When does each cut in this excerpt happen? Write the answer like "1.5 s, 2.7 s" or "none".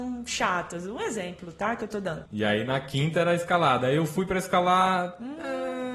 2.3 s